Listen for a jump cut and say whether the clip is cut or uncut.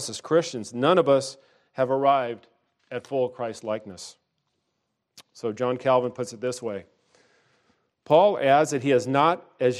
uncut